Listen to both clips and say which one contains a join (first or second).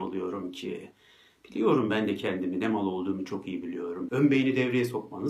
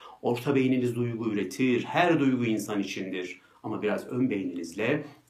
first